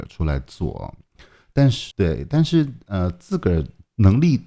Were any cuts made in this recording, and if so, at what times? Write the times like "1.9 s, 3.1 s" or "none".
1.9 s